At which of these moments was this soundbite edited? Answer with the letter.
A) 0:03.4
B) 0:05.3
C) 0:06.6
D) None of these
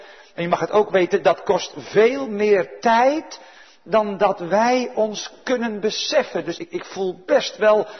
C